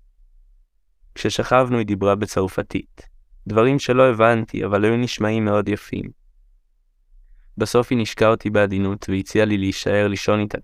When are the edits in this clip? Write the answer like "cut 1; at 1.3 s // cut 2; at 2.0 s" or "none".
none